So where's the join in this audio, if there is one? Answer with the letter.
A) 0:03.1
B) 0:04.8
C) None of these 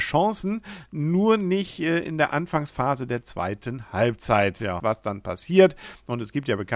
B